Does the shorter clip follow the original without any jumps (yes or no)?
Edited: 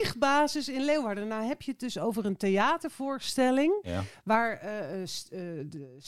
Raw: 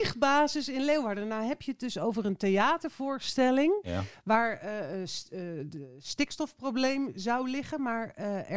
yes